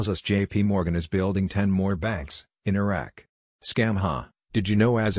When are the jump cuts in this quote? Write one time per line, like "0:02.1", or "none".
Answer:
0:03.5